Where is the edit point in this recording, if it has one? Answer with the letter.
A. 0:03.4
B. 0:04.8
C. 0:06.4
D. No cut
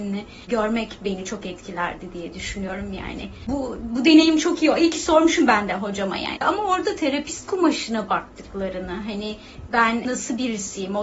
C